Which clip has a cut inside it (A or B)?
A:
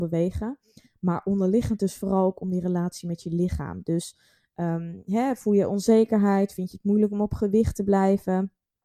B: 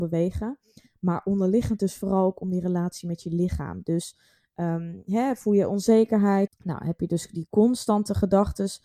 B